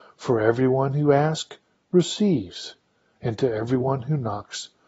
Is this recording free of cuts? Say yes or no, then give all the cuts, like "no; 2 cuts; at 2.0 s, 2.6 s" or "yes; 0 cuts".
no; 1 cut; at 3.2 s